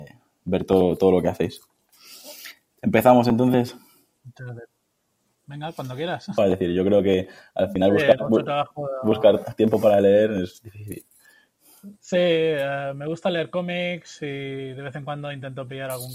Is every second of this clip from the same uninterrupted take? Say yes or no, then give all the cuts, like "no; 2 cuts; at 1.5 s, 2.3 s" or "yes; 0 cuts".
no; 2 cuts; at 6.4 s, 12.0 s